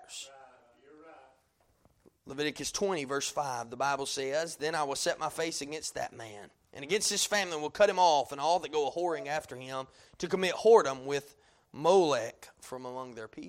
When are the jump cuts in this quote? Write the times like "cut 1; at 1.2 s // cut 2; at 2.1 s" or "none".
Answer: none